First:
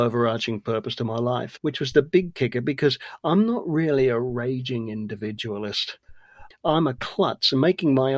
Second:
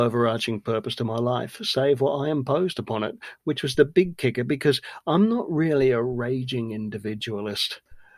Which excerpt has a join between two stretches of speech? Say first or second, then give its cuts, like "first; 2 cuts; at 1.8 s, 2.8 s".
first; 2 cuts; at 1.6 s, 6.5 s